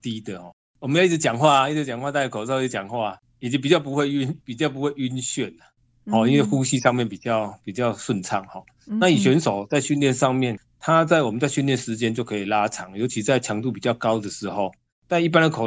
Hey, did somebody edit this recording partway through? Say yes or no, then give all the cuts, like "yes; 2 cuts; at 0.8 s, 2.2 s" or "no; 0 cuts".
no; 0 cuts